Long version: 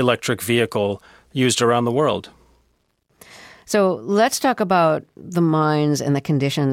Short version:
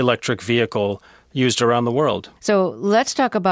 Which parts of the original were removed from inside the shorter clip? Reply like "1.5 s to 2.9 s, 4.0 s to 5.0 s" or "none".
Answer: 2.4 s to 3.6 s